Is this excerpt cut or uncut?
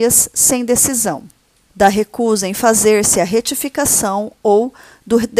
cut